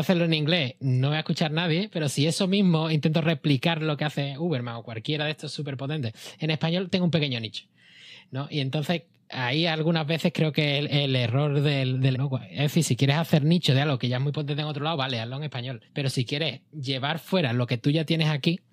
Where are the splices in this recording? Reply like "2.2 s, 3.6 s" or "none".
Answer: 12.1 s, 15.9 s